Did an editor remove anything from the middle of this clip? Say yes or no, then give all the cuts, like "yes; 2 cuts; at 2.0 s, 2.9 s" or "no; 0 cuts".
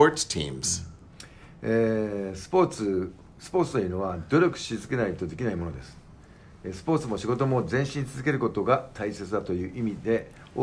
no; 0 cuts